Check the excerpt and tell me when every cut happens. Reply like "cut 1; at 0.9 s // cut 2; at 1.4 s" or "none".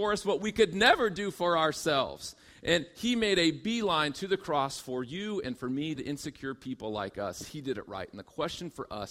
cut 1; at 6.0 s